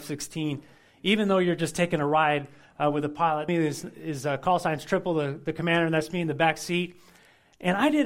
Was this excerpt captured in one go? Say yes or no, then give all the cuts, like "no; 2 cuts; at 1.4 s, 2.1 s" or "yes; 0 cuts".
no; 1 cut; at 3.5 s